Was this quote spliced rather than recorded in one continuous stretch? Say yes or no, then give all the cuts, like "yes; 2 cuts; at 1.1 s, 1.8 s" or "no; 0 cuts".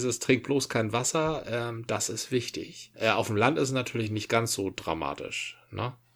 yes; 1 cut; at 2.9 s